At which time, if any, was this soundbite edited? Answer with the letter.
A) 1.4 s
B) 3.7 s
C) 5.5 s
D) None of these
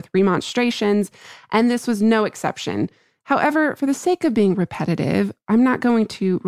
D